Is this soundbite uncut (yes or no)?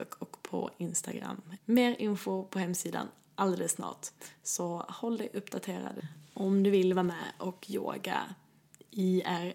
no